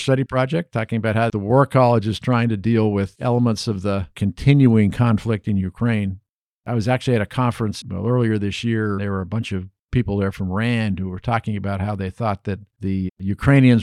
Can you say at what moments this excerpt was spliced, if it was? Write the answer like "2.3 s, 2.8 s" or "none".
9.0 s